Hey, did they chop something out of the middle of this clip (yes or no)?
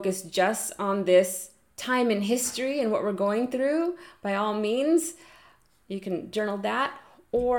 no